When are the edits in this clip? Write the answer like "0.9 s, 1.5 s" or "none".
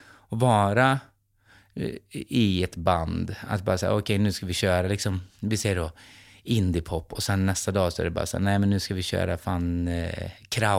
none